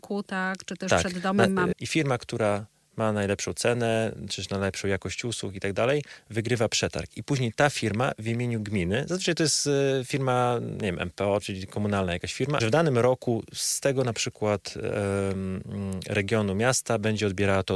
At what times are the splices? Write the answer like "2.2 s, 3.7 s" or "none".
1.7 s, 11.4 s, 12.6 s

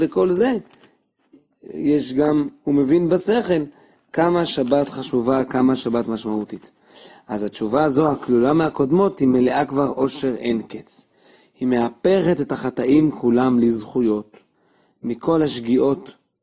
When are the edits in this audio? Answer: none

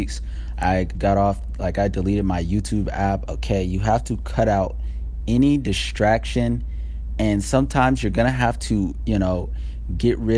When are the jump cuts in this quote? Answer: 0.9 s, 3.3 s

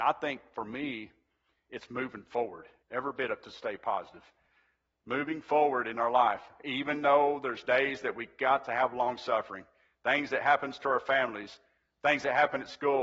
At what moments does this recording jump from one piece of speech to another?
2.8 s

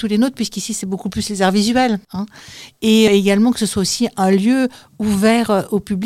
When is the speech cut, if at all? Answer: 2.0 s, 3.1 s

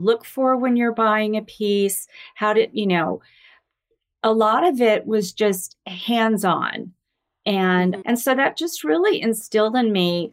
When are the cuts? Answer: 8.0 s

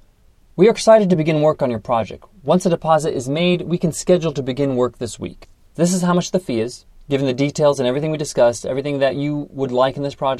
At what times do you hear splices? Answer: 5.7 s

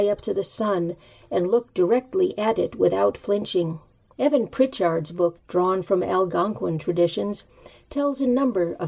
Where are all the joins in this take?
4.1 s, 5.4 s

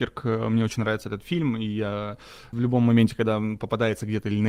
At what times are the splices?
2.5 s

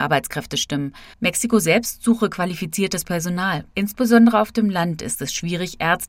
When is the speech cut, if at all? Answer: 1.1 s, 3.7 s

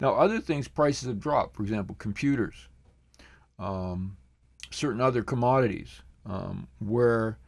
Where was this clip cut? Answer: none

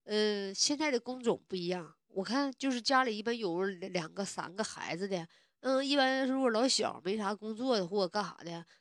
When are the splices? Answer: none

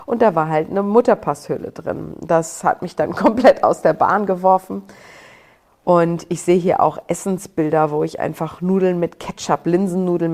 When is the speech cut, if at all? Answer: none

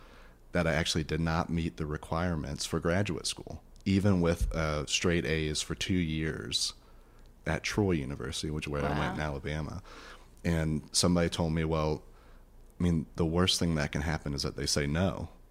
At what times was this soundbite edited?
none

